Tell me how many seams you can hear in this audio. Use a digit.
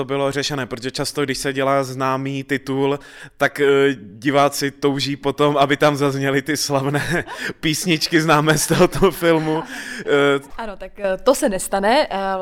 1